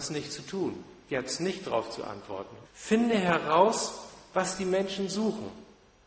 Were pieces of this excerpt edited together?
yes; 1 cut; at 2.6 s

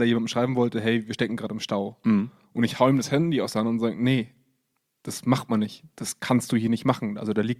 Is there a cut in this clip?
no; 0 cuts

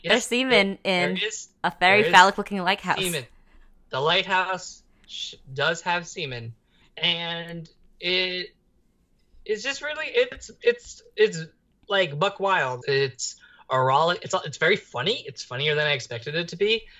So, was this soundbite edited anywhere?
yes; 2 cuts; at 6.8 s, 12.8 s

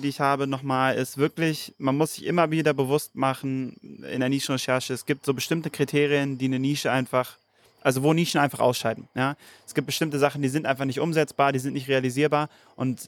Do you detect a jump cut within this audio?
no; 0 cuts

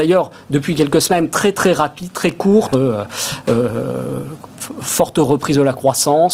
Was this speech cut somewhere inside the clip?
yes; 2 cuts; at 1.5 s, 2.7 s

